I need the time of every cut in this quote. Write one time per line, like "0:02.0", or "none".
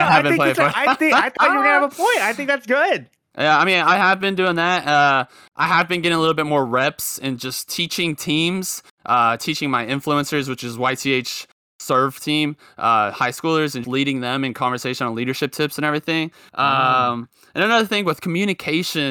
0:13.8
0:16.5